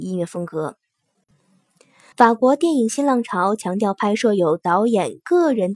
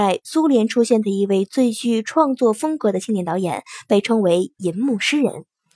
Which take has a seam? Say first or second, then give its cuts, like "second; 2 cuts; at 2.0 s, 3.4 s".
first; 1 cut; at 2.1 s